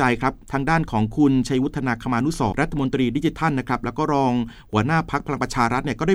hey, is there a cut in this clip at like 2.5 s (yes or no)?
yes